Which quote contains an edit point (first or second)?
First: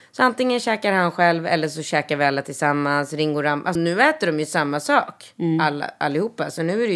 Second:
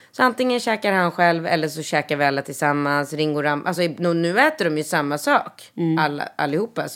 first